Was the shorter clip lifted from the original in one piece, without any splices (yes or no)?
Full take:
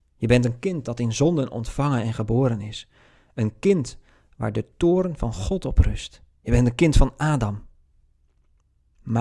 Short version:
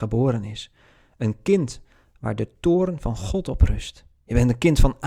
yes